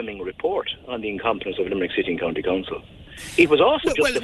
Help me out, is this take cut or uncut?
uncut